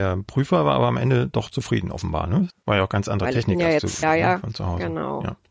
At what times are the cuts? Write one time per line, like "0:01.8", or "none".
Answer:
0:02.5
0:04.0